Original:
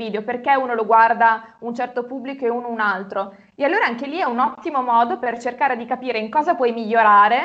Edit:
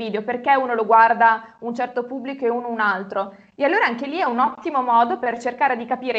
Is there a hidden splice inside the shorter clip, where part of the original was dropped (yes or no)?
no